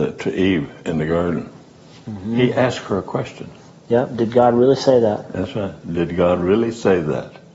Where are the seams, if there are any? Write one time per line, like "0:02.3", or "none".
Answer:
none